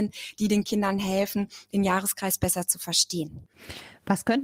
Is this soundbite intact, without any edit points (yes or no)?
yes